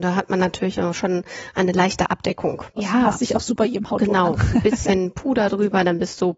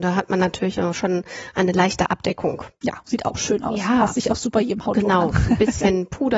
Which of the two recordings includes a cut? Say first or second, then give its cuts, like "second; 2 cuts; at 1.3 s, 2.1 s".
first; 1 cut; at 2.8 s